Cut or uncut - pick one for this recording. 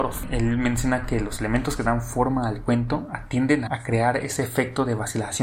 cut